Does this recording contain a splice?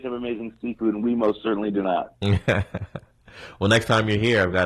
no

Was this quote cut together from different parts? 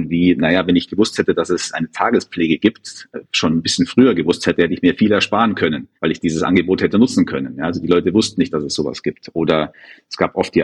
yes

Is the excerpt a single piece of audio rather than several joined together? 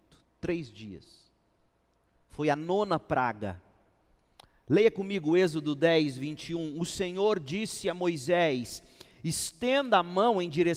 yes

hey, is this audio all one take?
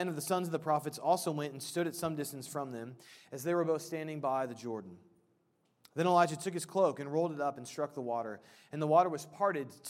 yes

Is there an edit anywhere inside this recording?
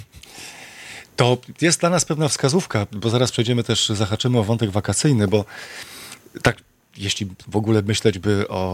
no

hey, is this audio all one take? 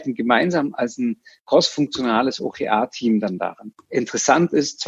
no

